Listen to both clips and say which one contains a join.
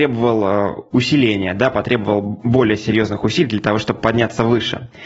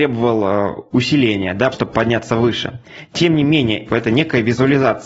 second; 2 cuts; at 1.7 s, 3.9 s

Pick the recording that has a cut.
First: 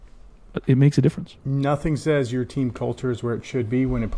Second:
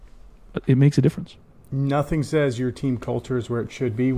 first; 1 cut; at 1.4 s

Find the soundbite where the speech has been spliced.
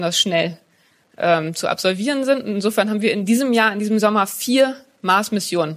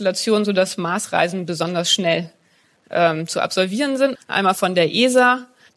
second; 1 cut; at 4.1 s

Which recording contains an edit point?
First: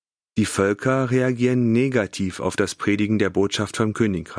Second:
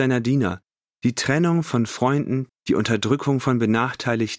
second; 1 cut; at 2.5 s

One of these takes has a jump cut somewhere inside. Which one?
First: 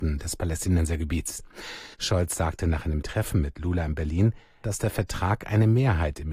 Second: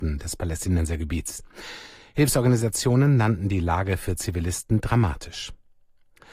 first; 2 cuts; at 1.9 s, 4.6 s

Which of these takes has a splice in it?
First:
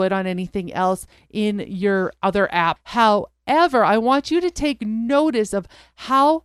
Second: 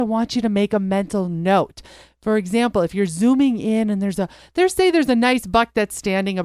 first; 1 cut; at 2.8 s

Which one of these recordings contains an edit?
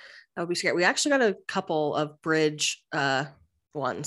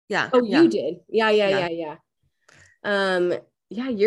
second; 1 cut; at 1.7 s

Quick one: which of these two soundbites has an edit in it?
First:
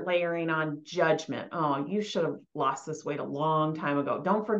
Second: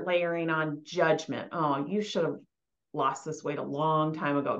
first; 1 cut; at 2.5 s

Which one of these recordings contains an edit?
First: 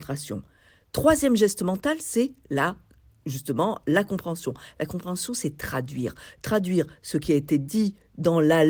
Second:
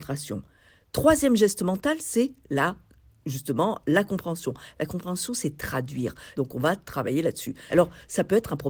second; 2 cuts; at 6.3 s, 7.7 s

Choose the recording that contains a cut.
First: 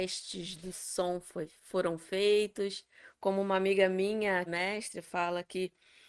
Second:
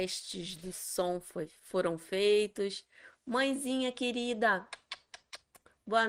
first; 2 cuts; at 3.1 s, 4.5 s

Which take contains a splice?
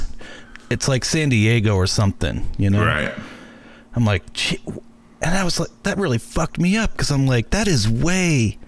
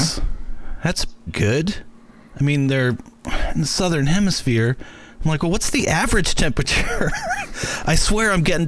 second; 1 cut; at 1.3 s

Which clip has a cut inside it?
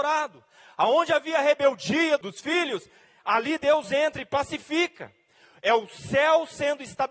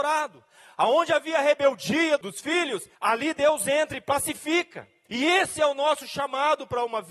second; 2 cuts; at 2.9 s, 5.1 s

